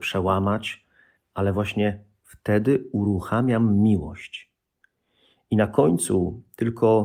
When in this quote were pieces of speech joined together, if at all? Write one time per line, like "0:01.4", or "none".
0:01.2